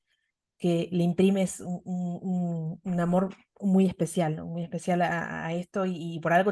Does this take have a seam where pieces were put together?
no; 0 cuts

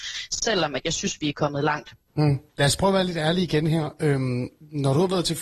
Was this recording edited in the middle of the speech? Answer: yes; 1 cut; at 2.5 s

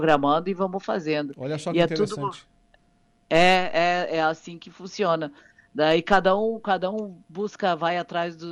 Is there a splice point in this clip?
no; 0 cuts

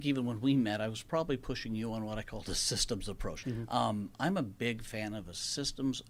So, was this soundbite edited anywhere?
yes; 1 cut; at 3.4 s

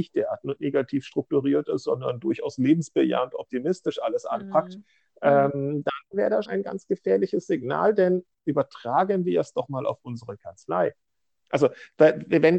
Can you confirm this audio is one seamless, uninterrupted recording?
no; 2 cuts; at 6.4 s, 11.3 s

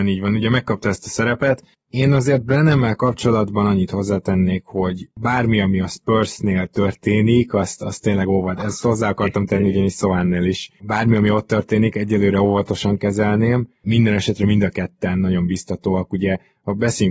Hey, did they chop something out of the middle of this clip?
no; 0 cuts

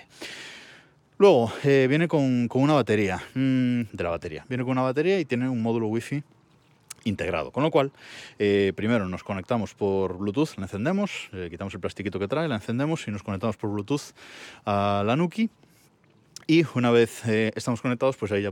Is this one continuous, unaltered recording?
no; 1 cut; at 3.9 s

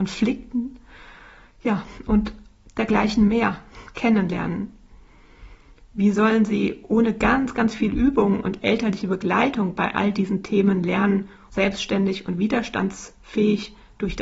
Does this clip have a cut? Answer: yes; 1 cut; at 11.5 s

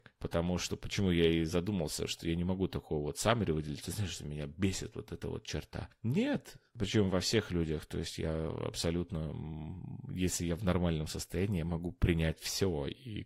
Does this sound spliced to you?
no; 0 cuts

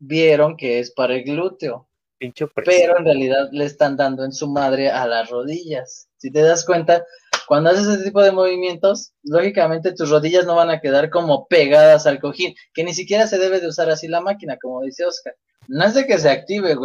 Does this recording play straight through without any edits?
no; 1 cut; at 15.6 s

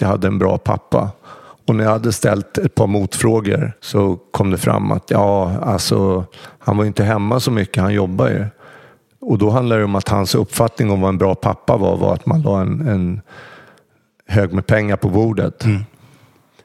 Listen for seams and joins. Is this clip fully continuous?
no; 1 cut; at 3.8 s

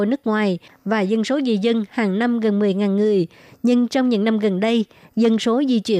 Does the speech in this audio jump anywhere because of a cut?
no; 0 cuts

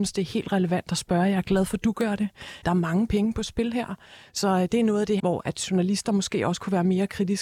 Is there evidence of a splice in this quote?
yes; 2 cuts; at 2.6 s, 5.2 s

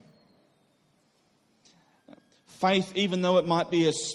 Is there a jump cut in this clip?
no; 0 cuts

